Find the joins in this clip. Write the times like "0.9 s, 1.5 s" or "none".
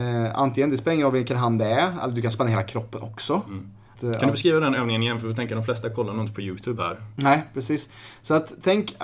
4.0 s